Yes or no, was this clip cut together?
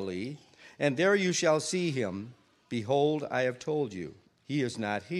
yes